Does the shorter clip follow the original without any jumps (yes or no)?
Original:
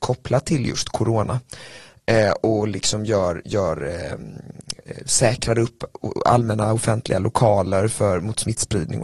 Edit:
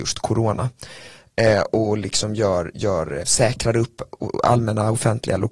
no